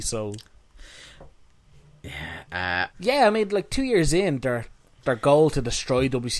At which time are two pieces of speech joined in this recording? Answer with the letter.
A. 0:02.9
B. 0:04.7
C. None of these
A